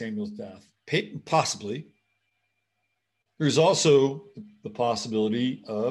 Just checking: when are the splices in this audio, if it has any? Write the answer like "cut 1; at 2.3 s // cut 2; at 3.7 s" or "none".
cut 1; at 3.2 s

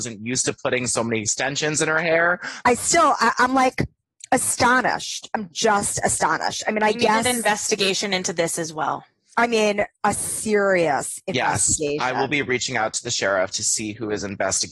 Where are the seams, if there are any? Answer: cut 1; at 2.6 s

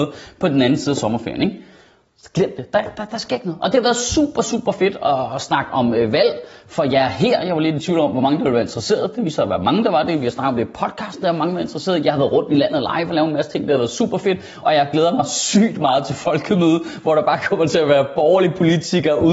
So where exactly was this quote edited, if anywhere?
none

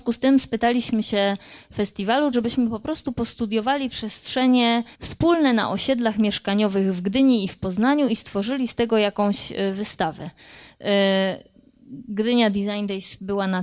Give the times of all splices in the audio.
cut 1; at 2.3 s // cut 2; at 4.9 s

